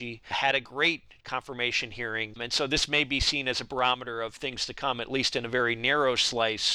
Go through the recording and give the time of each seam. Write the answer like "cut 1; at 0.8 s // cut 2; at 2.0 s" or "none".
cut 1; at 2.3 s